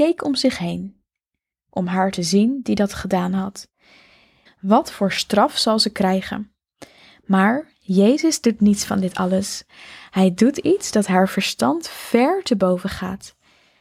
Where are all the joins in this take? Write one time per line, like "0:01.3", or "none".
0:04.5